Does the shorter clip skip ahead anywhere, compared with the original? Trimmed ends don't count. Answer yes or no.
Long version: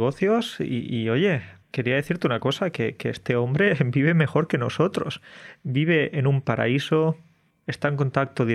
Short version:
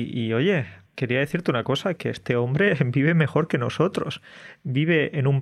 yes